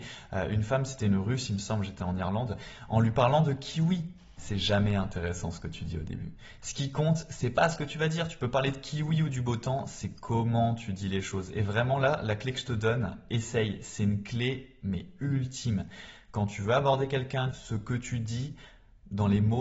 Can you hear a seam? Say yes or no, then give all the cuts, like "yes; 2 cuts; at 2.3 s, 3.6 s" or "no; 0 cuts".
yes; 2 cuts; at 4.4 s, 17.5 s